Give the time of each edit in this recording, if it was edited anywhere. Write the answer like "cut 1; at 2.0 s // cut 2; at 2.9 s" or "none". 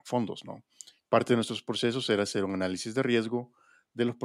cut 1; at 1.1 s